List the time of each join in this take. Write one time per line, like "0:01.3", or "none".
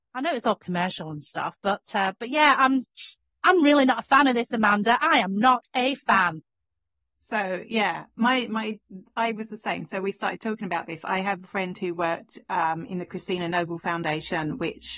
none